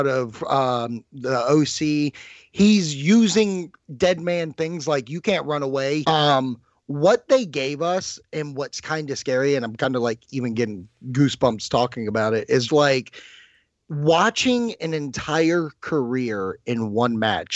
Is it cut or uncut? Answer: cut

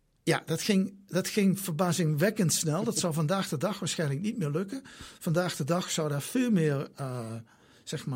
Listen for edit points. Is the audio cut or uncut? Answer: uncut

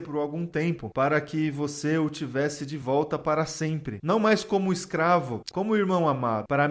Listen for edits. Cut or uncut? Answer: cut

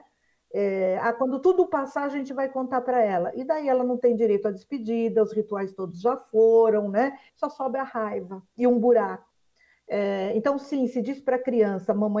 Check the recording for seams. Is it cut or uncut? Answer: uncut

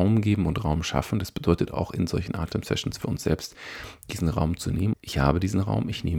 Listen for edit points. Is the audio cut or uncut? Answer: cut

